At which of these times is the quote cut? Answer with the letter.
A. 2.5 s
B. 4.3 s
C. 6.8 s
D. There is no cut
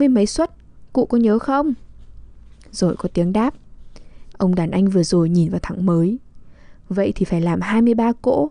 B